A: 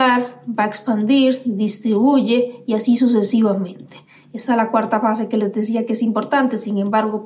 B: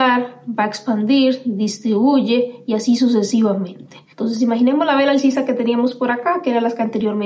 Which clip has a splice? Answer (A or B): B